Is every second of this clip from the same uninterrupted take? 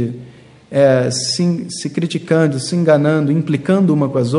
yes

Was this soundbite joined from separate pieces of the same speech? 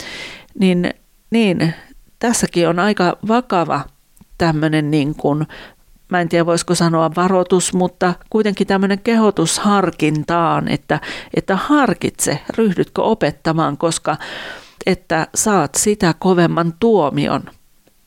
yes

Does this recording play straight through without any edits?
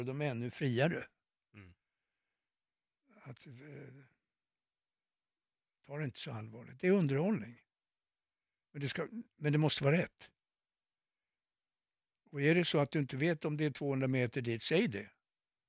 yes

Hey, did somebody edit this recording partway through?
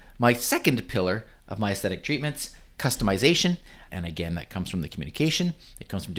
yes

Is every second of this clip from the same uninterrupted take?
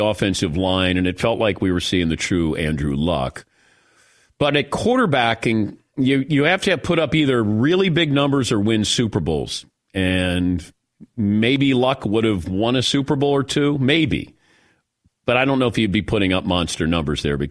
yes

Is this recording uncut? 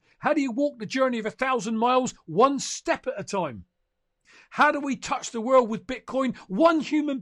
yes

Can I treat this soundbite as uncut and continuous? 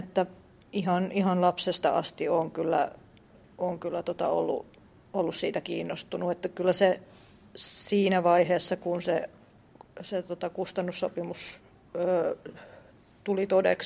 yes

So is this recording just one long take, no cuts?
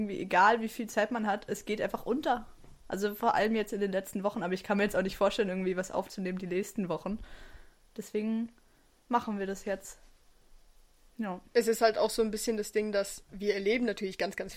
yes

